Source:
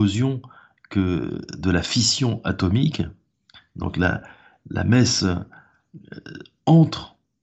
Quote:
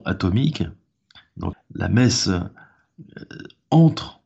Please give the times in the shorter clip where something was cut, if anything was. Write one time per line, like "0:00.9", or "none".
0:01.5

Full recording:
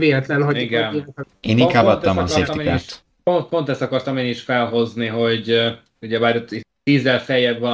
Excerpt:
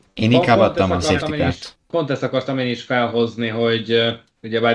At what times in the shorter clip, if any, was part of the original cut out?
0:01.9

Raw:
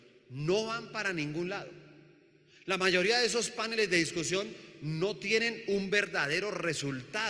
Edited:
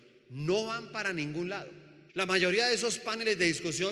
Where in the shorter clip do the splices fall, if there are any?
0:02.1

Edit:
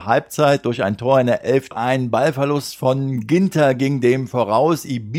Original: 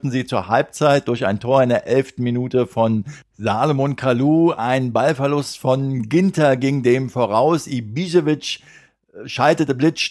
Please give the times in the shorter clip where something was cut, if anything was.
0:01.7

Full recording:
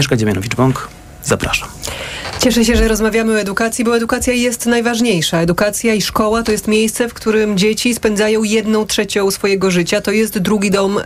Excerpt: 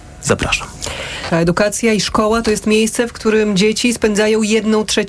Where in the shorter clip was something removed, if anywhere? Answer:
0:01.3

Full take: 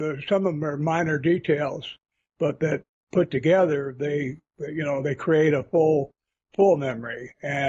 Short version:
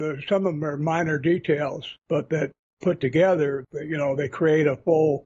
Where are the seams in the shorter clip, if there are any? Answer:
0:02.0
0:03.6

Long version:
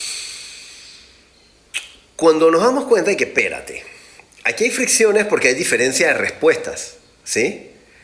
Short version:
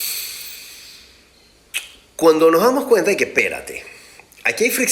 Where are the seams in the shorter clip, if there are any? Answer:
none

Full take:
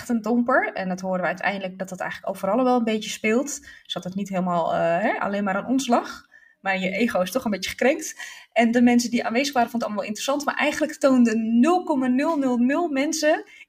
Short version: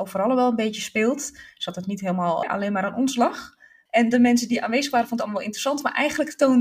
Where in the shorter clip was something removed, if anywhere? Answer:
0:02.4
0:03.9

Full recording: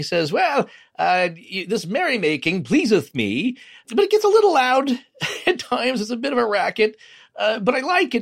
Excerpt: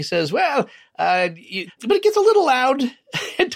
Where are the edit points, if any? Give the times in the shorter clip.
0:01.7

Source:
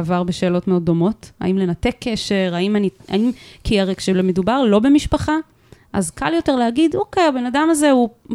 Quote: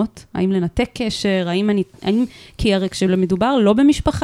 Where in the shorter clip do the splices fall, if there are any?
none

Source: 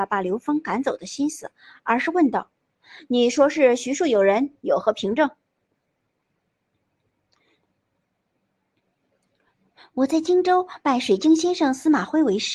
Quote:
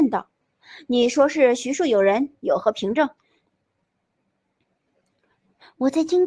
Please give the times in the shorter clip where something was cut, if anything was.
0:03.2

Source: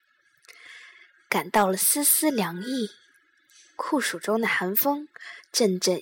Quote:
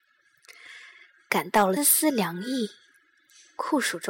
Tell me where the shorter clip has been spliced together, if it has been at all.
0:01.8

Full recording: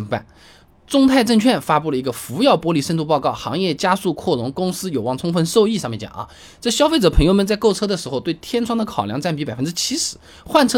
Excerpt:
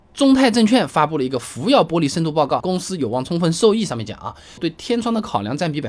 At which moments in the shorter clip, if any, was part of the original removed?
0:02.6
0:04.6

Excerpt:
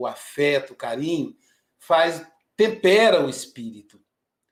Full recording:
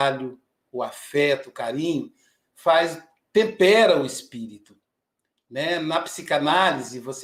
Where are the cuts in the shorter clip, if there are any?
none

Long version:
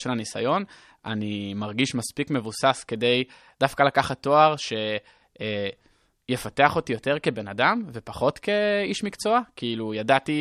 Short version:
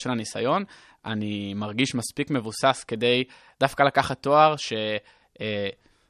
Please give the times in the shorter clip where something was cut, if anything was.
none

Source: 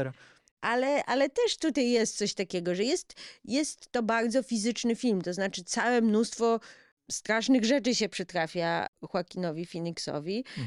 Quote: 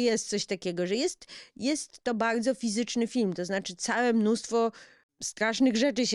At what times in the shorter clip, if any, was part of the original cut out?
none

